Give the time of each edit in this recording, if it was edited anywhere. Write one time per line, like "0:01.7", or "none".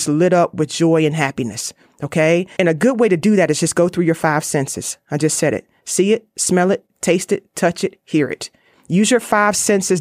0:02.6